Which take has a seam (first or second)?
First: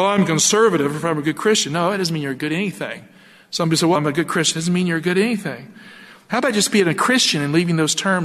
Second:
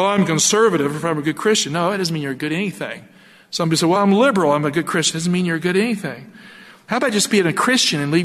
first